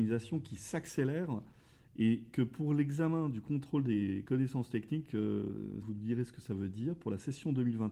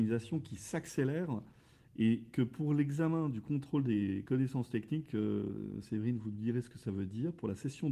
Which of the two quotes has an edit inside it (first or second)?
first